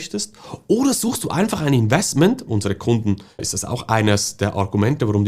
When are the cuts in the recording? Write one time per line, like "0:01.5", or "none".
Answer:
0:02.5